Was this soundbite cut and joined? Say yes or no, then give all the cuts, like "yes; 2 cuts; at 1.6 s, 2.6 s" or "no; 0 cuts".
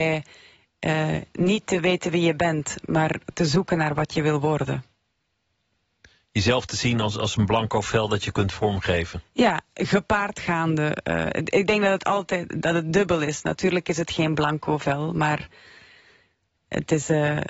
no; 0 cuts